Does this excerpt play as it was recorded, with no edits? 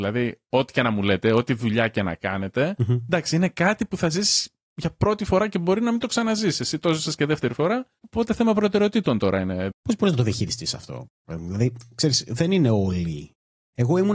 no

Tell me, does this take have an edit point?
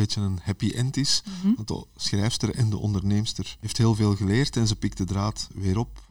no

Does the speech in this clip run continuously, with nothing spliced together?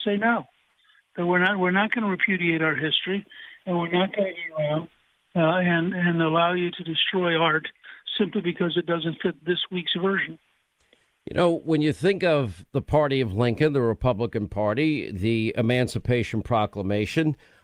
yes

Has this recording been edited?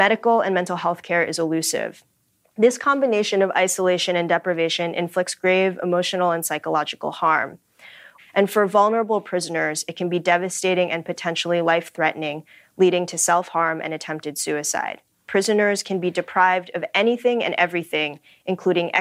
yes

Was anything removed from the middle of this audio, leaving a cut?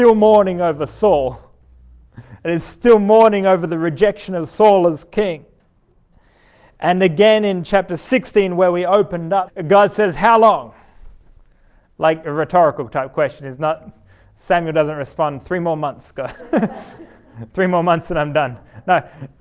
yes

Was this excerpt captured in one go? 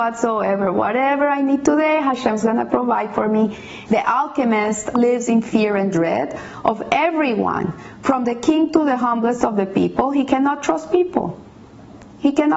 no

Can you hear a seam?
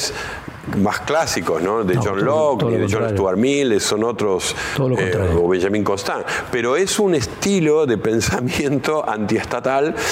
no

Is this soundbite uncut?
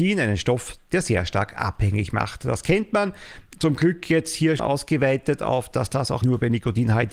no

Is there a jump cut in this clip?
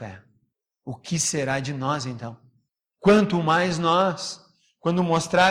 no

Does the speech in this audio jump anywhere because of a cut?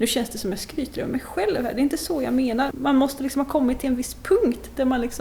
yes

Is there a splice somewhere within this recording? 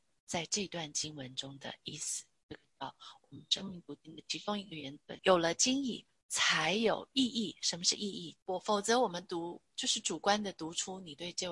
yes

